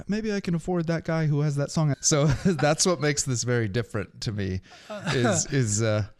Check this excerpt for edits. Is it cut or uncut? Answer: cut